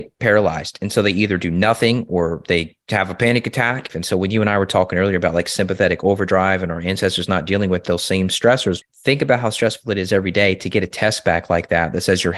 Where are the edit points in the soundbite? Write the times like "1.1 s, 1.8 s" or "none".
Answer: 3.9 s, 8.8 s